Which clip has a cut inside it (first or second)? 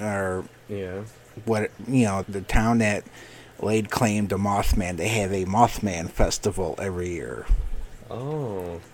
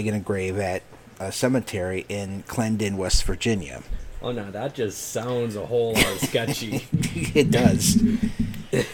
first